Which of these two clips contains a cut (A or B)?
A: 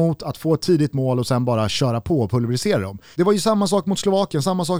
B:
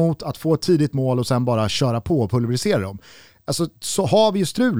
A